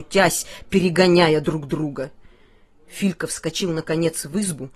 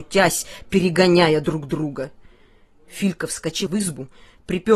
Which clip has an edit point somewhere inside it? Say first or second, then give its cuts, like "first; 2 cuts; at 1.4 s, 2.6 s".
second; 1 cut; at 3.7 s